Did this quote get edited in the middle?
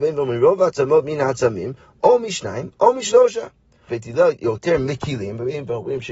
yes; 1 cut; at 3.9 s

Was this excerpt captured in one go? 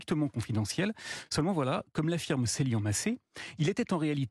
yes; 0 cuts

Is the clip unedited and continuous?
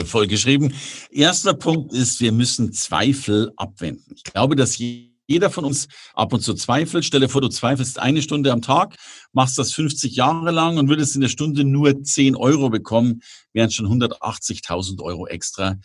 yes; 0 cuts

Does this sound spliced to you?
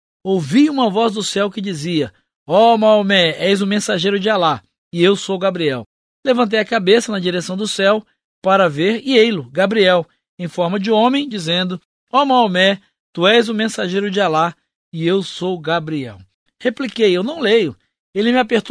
yes; 2 cuts; at 11.3 s, 16.5 s

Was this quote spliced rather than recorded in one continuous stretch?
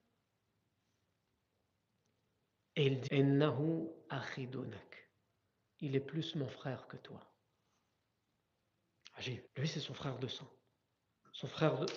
yes; 2 cuts; at 3.1 s, 9.5 s

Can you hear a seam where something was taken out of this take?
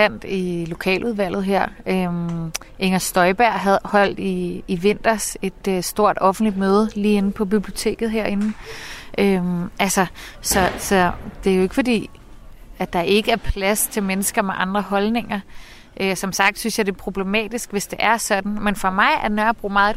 no; 0 cuts

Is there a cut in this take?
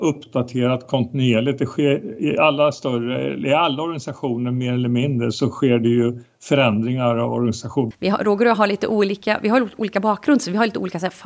yes; 1 cut; at 7.9 s

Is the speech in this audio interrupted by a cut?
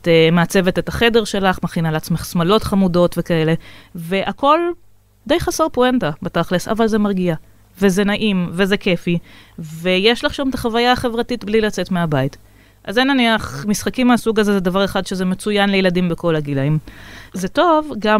yes; 1 cut; at 17.3 s

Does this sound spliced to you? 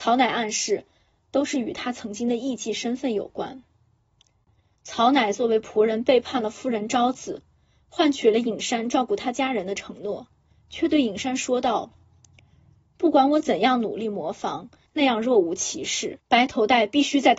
yes; 3 cuts; at 1.1 s, 14.9 s, 16.2 s

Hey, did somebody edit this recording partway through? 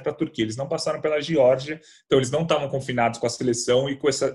no; 0 cuts

